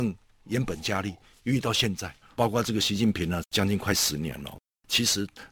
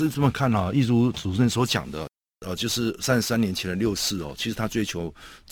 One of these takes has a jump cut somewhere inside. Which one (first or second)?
first